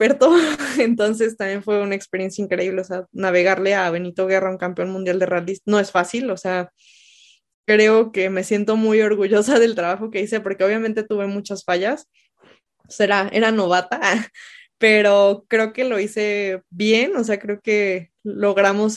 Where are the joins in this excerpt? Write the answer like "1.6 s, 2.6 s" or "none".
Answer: none